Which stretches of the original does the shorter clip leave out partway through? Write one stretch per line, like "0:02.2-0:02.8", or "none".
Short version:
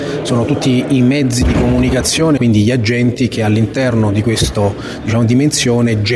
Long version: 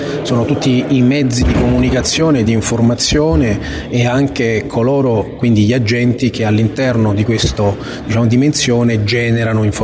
0:02.4-0:05.4